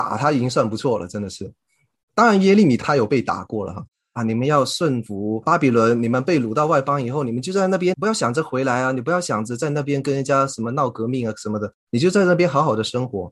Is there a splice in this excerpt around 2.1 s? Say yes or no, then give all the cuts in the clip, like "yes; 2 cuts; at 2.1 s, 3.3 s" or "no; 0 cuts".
no; 1 cut; at 4.2 s